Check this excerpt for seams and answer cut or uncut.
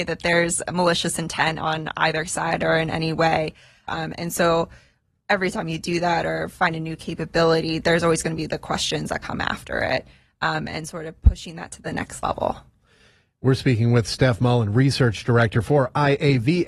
cut